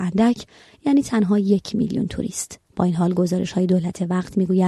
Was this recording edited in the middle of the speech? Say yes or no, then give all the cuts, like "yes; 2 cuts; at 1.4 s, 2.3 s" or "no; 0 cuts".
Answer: no; 0 cuts